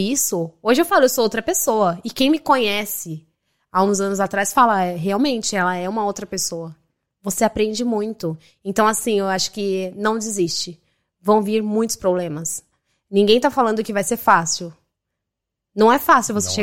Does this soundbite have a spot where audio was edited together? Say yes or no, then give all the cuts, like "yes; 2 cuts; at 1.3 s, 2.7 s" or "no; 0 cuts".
no; 0 cuts